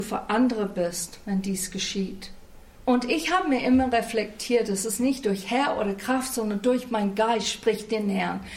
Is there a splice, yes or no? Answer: no